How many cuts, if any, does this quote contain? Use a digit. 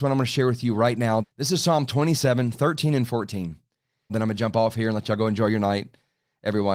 2